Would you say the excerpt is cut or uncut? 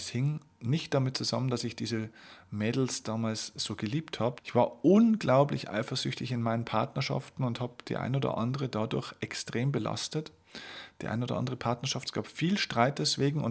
cut